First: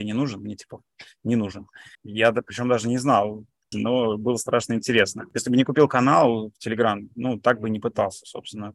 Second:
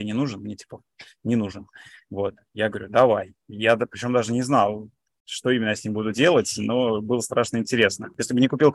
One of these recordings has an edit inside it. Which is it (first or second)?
first